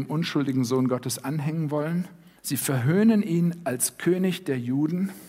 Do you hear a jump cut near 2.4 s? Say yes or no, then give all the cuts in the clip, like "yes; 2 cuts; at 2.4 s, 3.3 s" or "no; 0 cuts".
yes; 1 cut; at 2.4 s